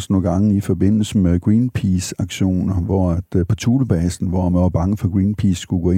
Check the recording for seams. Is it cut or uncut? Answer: uncut